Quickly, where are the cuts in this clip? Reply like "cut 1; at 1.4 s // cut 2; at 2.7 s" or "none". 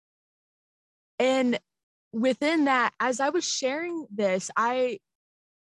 none

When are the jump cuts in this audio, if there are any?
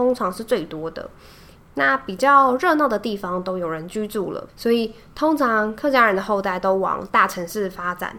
cut 1; at 1.6 s // cut 2; at 4.5 s

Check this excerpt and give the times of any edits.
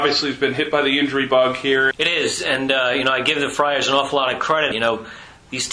cut 1; at 1.9 s // cut 2; at 4.7 s

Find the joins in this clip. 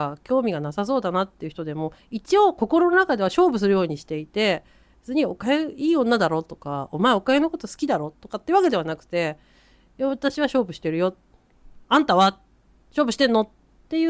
none

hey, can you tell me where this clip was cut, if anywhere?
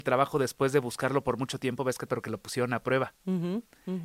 cut 1; at 2.1 s

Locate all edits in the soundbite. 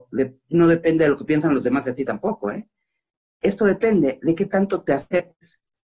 none

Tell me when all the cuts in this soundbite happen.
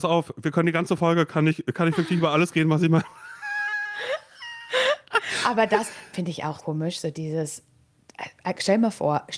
cut 1; at 6.6 s

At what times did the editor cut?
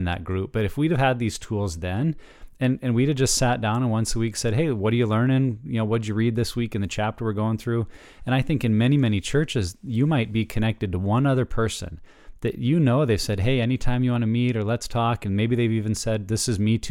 none

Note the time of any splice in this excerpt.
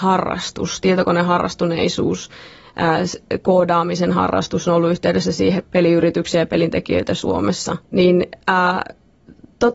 cut 1; at 5.6 s // cut 2; at 7.8 s

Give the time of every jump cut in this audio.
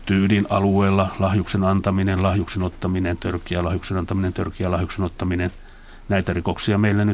none

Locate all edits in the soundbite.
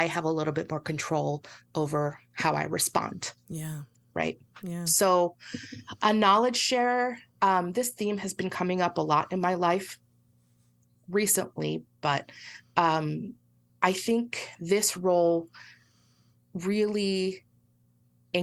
none

